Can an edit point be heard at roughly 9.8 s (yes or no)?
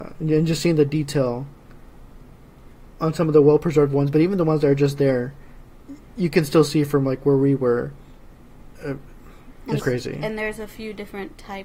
yes